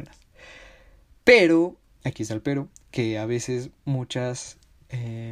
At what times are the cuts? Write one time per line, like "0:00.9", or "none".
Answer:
none

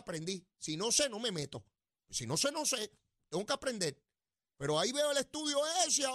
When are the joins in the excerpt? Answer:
none

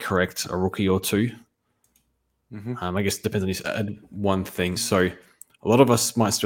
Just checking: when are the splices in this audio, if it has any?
0:03.6
0:04.8

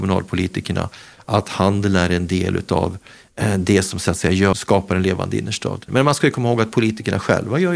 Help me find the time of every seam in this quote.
0:04.5
0:05.9

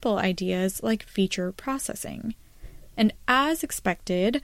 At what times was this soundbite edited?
0:02.9

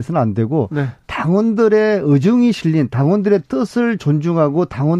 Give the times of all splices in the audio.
none

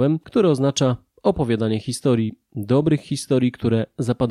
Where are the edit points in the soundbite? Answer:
none

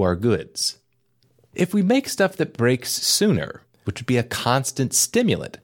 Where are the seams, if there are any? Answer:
0:03.8

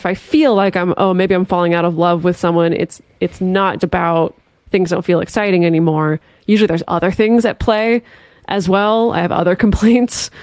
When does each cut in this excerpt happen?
0:03.8

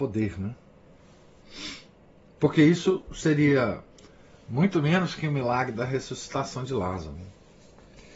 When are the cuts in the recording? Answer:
none

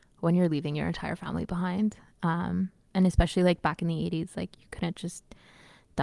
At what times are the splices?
none

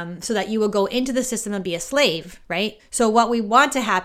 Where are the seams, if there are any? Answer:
0:02.8

